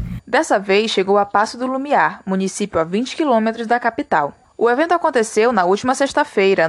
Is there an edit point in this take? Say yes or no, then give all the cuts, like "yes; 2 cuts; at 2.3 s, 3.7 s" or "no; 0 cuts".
no; 0 cuts